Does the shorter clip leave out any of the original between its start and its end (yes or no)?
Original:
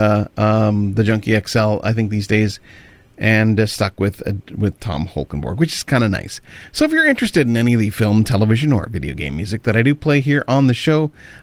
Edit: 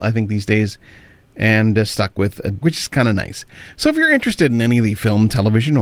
yes